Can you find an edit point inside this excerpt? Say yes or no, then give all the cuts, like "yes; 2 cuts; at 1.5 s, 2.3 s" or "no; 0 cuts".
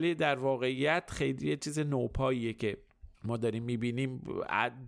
yes; 1 cut; at 3.1 s